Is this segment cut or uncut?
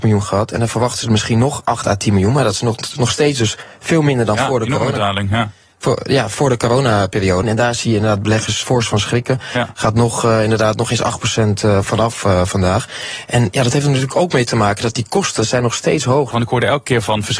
cut